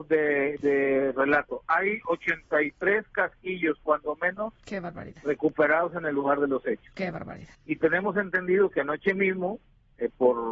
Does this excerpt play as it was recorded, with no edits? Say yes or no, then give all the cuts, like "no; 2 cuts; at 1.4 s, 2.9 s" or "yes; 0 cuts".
no; 1 cut; at 7.5 s